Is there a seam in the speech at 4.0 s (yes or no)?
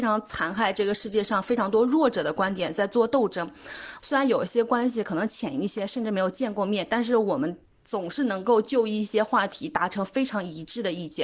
yes